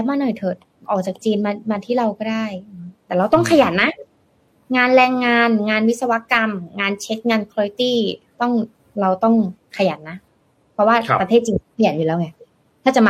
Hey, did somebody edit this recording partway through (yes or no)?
no